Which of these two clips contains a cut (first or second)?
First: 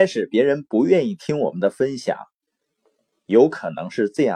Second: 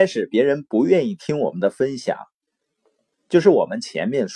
second